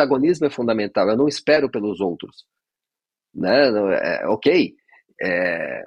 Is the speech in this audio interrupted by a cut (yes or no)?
no